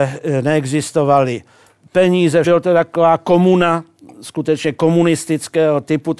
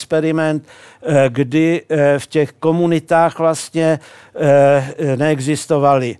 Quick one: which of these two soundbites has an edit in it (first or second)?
first